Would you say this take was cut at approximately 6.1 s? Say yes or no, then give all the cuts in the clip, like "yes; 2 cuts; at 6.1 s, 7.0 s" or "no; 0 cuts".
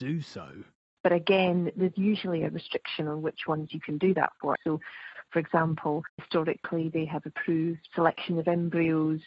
no; 2 cuts; at 1.0 s, 4.6 s